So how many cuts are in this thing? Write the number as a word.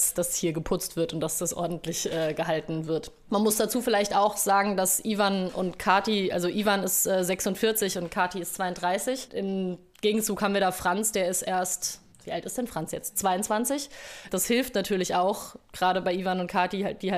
one